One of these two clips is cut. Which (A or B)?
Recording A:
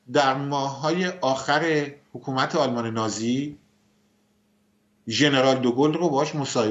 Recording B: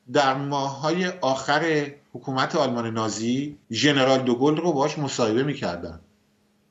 B